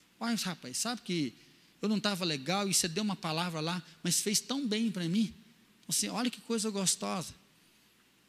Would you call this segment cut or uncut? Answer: uncut